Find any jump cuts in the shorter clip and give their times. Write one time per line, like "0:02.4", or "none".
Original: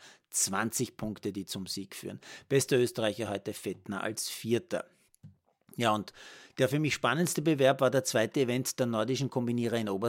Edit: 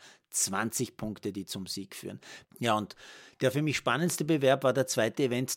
0:02.4